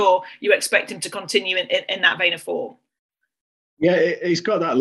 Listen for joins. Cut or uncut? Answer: uncut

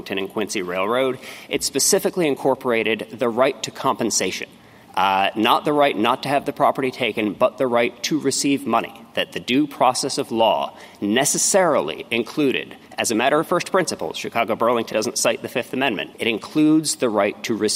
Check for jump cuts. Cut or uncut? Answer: cut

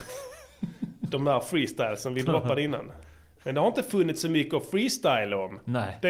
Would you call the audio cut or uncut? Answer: uncut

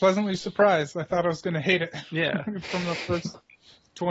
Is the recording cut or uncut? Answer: uncut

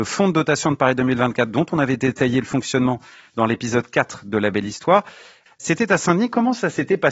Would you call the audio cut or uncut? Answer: cut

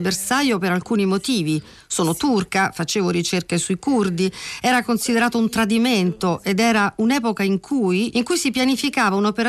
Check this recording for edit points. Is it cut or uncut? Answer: cut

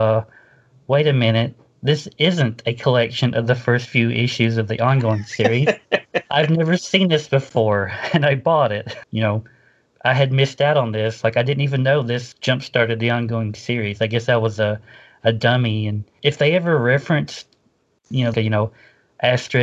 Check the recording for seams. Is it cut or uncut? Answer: cut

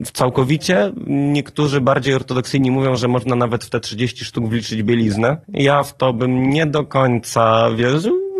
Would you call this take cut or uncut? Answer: cut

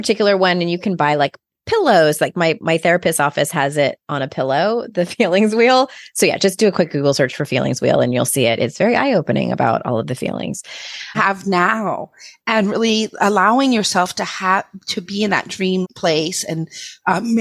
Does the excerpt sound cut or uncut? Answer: cut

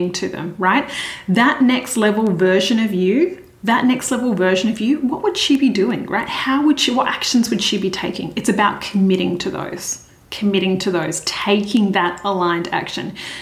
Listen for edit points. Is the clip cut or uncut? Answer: uncut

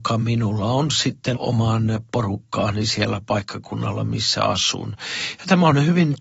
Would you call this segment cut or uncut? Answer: cut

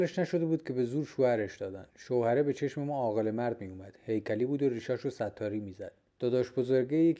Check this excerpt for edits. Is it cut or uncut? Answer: cut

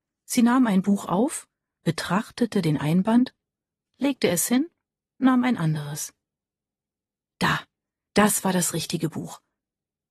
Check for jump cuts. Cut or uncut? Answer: uncut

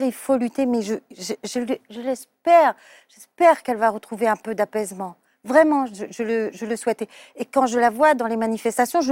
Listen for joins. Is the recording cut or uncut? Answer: uncut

